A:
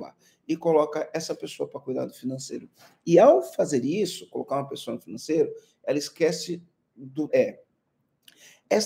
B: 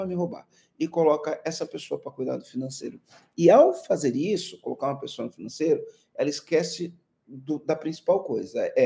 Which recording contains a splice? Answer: A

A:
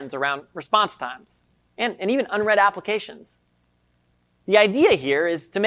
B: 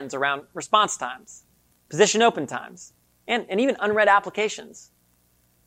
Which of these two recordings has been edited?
A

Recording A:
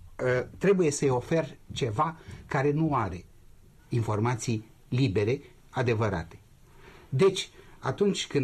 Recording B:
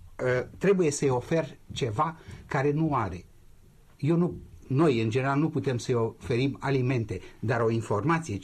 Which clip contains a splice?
A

